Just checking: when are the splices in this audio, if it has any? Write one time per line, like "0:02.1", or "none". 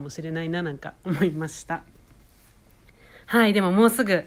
none